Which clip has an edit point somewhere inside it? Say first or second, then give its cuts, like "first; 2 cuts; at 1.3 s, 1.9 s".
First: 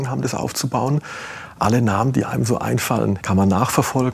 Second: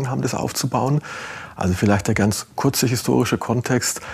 first; 2 cuts; at 1.5 s, 3.2 s